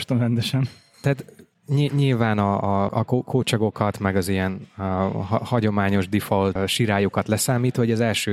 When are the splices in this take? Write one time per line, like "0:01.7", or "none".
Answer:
0:02.9
0:06.6